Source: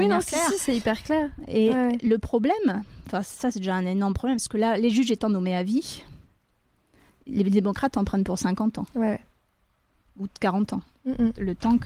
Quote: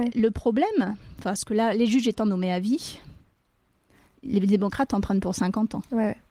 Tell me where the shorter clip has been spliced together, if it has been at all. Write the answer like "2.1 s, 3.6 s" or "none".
1.4 s